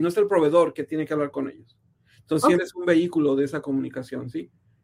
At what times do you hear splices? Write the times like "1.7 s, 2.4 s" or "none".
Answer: 2.6 s